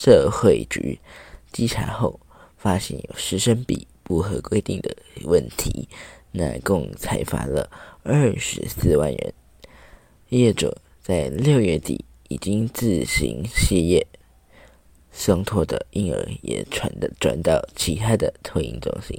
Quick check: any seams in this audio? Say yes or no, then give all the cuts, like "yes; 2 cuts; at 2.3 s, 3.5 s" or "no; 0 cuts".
no; 0 cuts